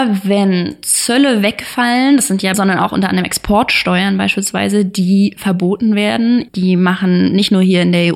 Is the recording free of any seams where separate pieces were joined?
no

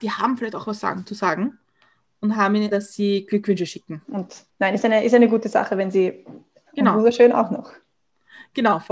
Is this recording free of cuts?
no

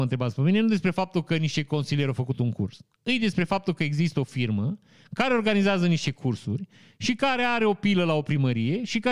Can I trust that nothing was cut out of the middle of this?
yes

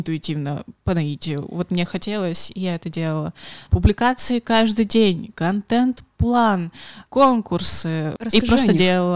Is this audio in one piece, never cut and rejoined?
no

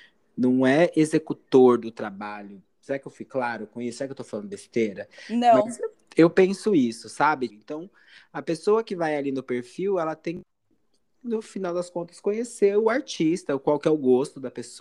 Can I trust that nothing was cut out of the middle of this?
no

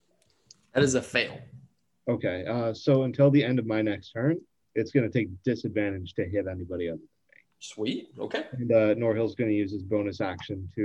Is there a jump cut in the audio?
no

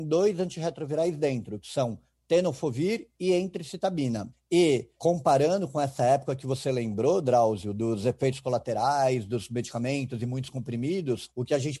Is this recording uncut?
yes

